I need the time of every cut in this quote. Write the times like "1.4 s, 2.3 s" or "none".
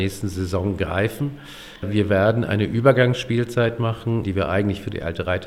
4.2 s

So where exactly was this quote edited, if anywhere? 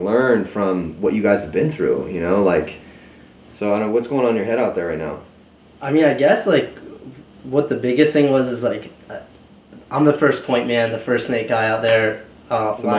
none

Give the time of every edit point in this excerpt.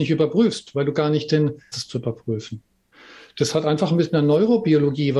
1.7 s

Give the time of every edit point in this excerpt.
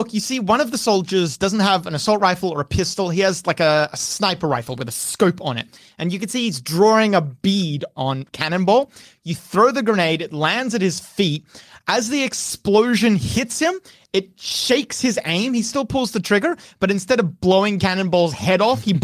none

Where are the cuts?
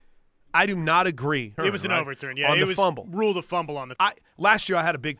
1.6 s, 4.0 s

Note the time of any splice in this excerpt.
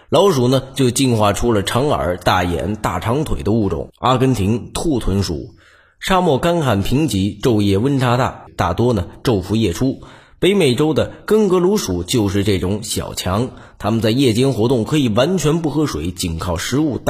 8.5 s

